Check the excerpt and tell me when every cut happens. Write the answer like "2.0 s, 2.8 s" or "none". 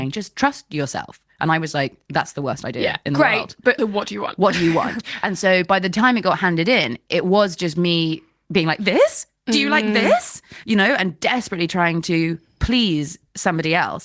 3.8 s